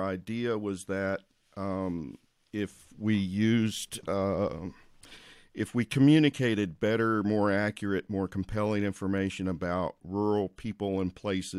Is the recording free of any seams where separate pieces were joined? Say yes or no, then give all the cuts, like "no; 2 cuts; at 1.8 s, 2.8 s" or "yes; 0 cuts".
yes; 0 cuts